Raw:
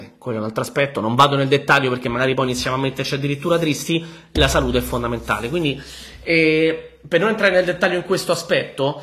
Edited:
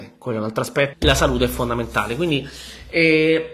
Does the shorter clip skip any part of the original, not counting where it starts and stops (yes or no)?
yes